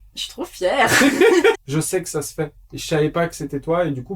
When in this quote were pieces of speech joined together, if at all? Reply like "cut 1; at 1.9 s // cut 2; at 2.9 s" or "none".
cut 1; at 1.5 s // cut 2; at 2.6 s